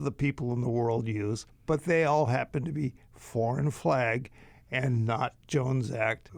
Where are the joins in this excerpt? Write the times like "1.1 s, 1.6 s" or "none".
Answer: 1.5 s